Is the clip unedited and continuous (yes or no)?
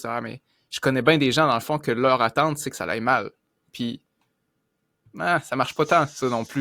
yes